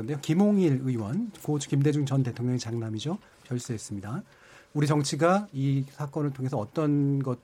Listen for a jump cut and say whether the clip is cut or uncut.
uncut